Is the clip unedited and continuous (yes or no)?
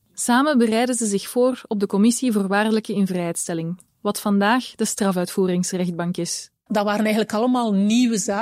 no